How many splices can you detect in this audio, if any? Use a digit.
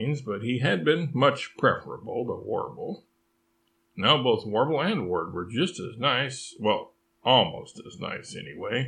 0